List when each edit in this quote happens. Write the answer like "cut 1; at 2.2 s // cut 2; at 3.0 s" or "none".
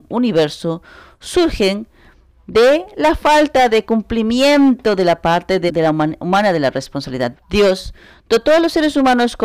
cut 1; at 5.7 s // cut 2; at 7.3 s